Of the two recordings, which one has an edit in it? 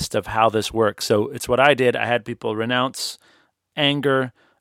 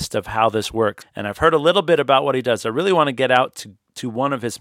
second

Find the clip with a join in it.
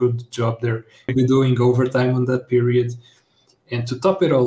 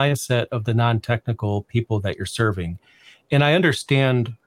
first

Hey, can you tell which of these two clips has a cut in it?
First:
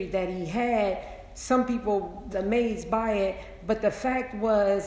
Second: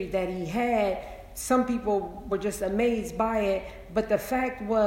first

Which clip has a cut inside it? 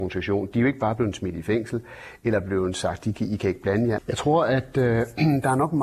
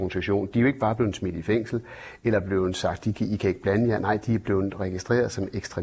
first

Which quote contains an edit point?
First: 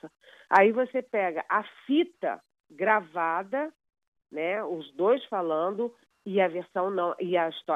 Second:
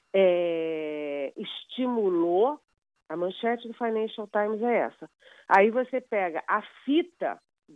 second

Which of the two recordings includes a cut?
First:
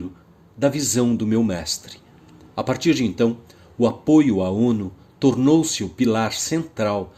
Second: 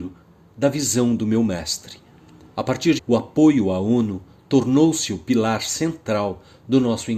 second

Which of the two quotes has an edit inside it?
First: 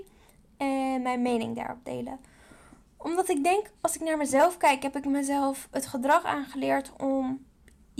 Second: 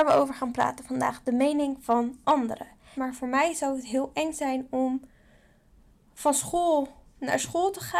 second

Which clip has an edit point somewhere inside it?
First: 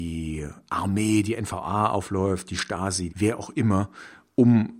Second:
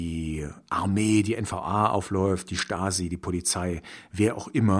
first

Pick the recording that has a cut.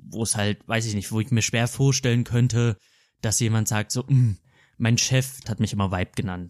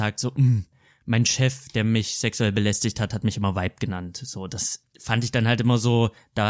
first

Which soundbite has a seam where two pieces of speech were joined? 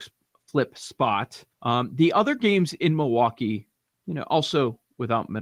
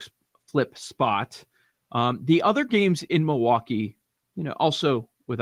first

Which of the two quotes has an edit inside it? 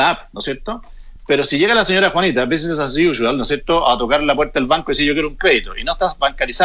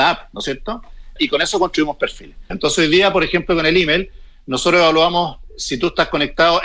second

